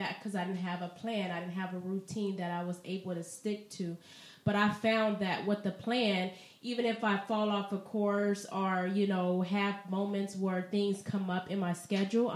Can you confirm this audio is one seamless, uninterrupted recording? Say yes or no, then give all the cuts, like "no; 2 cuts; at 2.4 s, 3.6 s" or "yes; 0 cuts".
yes; 0 cuts